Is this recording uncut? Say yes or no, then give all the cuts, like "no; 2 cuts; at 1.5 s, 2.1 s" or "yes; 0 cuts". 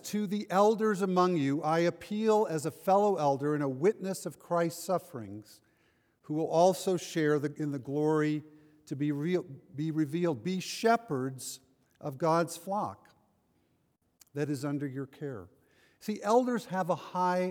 yes; 0 cuts